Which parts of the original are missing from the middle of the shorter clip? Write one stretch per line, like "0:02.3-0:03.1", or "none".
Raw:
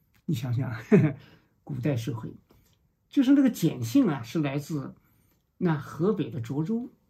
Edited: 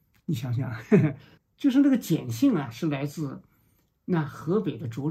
0:01.4-0:02.9